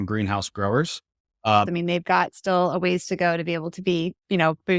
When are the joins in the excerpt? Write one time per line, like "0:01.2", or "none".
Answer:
0:01.7

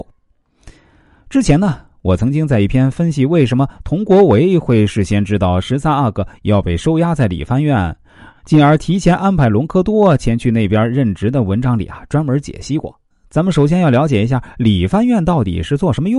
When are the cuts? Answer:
0:13.1

